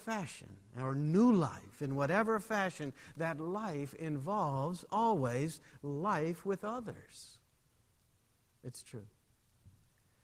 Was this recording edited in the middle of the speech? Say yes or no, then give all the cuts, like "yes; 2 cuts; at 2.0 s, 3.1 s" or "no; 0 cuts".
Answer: no; 0 cuts